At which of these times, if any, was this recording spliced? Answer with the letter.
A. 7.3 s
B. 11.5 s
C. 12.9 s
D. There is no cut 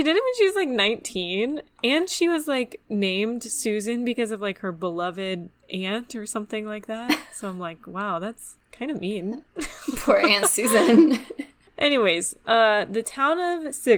D